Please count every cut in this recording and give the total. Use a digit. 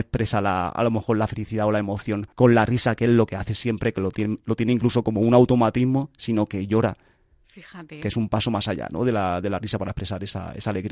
1